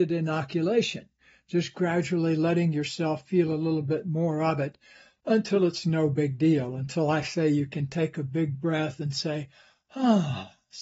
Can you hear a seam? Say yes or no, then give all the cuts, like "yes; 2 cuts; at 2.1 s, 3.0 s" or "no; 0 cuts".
no; 0 cuts